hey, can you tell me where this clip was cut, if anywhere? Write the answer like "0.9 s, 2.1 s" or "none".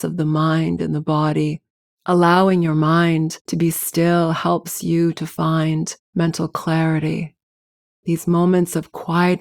1.8 s, 3.4 s, 6.0 s